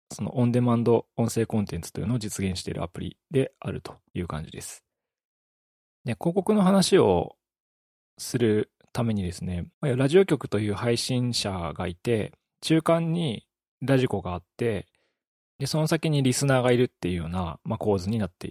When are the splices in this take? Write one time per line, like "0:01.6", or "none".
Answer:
0:09.7